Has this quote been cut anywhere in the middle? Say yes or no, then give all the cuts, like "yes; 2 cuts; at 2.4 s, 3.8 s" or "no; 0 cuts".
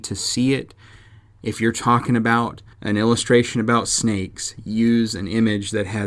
yes; 1 cut; at 2.7 s